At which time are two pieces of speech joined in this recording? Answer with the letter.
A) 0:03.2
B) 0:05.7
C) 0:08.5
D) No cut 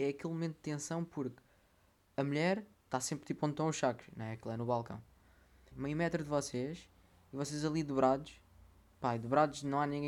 B